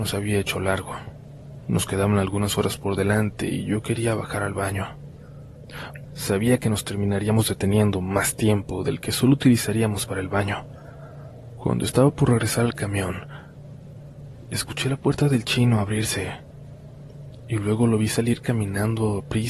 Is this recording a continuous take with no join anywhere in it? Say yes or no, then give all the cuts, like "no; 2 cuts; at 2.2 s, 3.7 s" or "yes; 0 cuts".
no; 2 cuts; at 6.1 s, 11.5 s